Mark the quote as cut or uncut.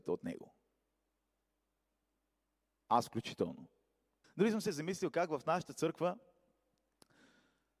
cut